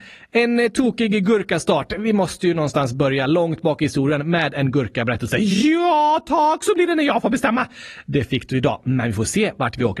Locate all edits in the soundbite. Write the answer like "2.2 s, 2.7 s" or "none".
none